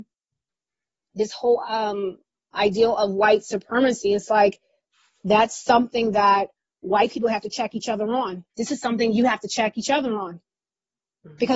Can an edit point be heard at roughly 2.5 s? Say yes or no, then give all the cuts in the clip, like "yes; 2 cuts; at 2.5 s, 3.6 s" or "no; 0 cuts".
yes; 2 cuts; at 2.5 s, 8.5 s